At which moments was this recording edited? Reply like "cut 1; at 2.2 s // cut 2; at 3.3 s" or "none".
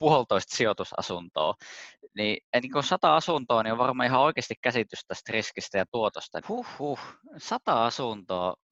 cut 1; at 6.4 s